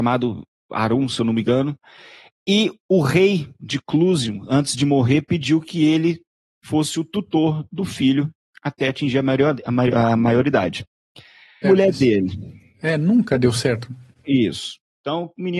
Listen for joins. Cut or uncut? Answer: cut